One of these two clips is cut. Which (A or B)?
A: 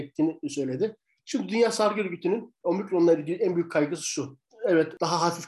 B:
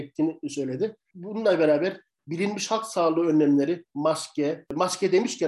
B